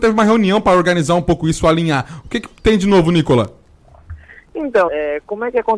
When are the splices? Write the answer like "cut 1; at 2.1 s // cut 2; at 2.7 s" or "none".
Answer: cut 1; at 4.9 s